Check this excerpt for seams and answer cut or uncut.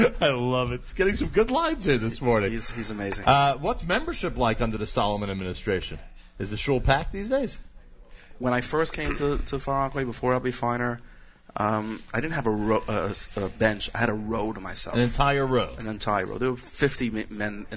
uncut